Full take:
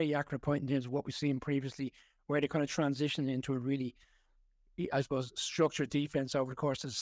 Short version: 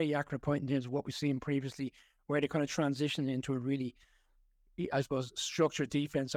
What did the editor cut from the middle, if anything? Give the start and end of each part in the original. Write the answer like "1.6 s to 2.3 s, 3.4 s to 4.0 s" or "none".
none